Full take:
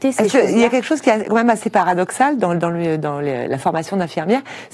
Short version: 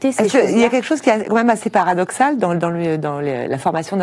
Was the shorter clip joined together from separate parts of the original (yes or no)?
no